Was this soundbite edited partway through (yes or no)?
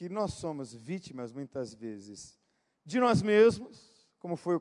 no